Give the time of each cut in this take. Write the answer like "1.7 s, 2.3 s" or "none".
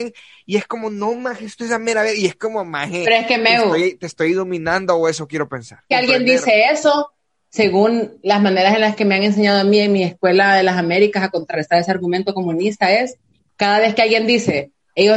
5.9 s